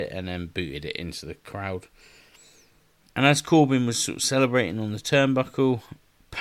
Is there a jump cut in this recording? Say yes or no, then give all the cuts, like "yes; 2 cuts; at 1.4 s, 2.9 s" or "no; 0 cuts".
yes; 1 cut; at 3.1 s